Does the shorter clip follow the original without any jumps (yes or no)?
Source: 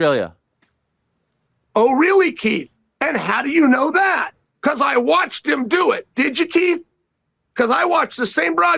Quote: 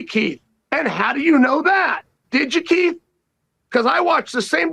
no